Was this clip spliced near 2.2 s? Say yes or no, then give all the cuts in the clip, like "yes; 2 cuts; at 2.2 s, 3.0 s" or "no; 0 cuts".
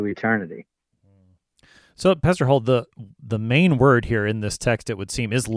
no; 0 cuts